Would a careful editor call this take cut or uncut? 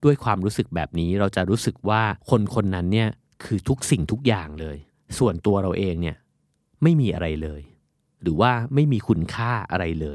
cut